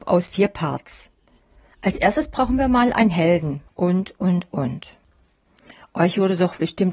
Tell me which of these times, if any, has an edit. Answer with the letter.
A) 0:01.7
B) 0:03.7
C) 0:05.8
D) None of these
B